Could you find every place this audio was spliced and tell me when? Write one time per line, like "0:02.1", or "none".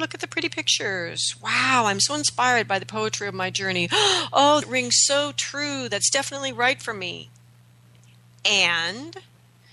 0:04.6